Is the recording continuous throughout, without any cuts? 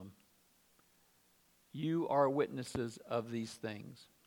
yes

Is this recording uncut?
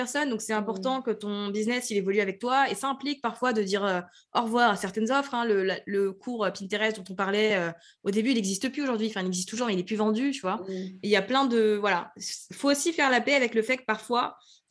yes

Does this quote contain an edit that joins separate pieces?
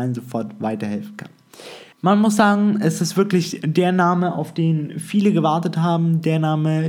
yes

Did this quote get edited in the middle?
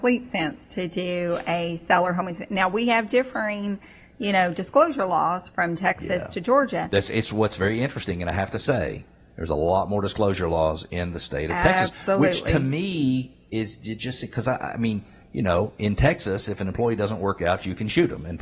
no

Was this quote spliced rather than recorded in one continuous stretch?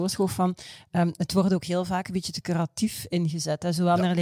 no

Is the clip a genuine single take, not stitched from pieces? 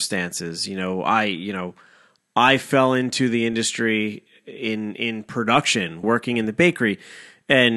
no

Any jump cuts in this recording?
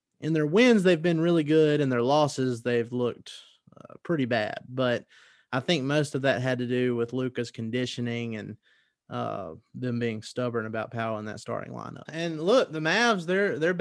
yes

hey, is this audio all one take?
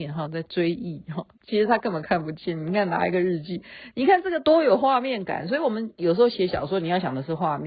yes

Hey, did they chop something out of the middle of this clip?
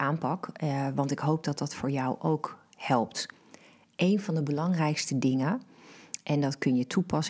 no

